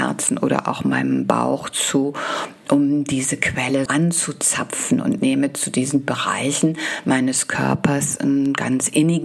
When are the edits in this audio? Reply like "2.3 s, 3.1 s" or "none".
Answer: 3.9 s